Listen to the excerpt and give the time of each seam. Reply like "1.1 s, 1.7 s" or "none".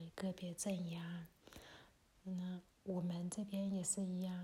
2.7 s